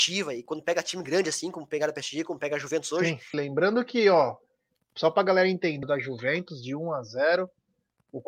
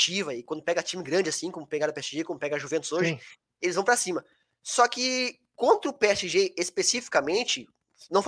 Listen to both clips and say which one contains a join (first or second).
first